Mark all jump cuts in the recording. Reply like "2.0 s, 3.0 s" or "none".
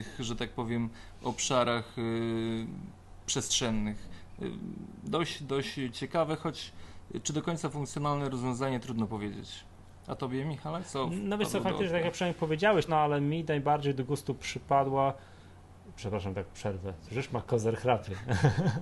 12.9 s